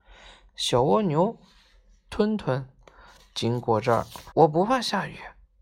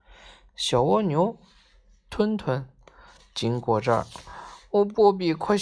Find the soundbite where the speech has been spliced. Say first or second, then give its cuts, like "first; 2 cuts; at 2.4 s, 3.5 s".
first; 1 cut; at 4.3 s